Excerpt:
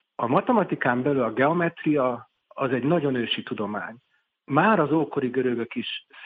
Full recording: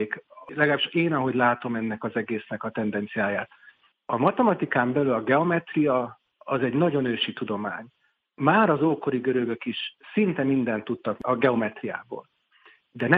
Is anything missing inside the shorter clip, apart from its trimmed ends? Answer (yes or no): no